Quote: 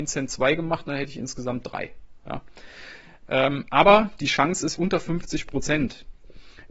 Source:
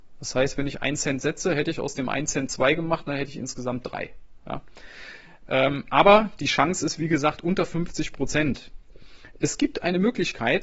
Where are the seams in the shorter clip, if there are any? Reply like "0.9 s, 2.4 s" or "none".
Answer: 4.8 s